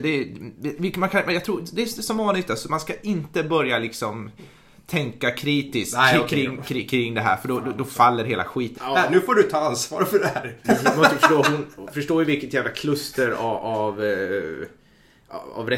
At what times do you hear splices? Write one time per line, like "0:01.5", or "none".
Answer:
0:08.8
0:10.6